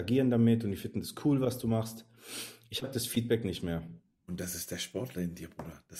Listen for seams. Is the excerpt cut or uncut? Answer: cut